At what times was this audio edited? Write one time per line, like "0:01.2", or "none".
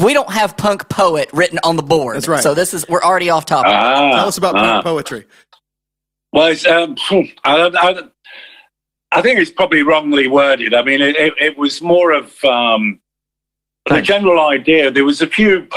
none